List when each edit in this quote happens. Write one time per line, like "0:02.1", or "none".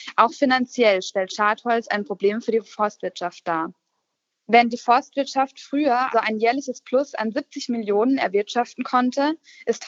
0:04.3
0:06.1